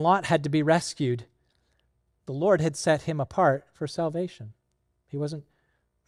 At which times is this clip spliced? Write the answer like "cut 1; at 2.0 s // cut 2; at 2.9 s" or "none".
none